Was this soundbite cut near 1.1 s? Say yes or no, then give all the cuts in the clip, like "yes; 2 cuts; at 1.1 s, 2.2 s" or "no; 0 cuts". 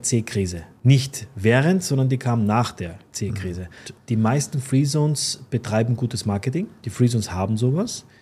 no; 2 cuts; at 3.8 s, 6.8 s